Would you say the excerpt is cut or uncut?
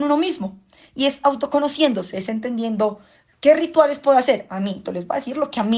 cut